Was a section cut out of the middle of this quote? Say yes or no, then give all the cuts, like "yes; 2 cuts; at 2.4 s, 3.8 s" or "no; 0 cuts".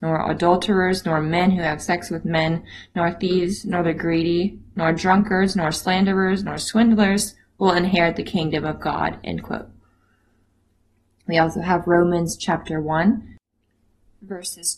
no; 0 cuts